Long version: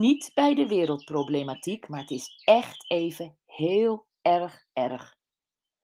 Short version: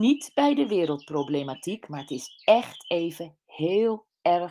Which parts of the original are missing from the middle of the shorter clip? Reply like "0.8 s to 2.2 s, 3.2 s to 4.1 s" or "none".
none